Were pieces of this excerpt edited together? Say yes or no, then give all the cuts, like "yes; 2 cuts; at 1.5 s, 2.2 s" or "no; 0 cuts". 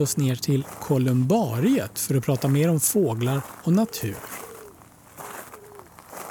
no; 0 cuts